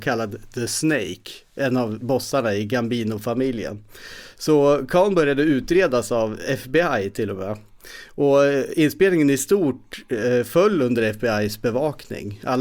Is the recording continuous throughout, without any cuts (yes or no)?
yes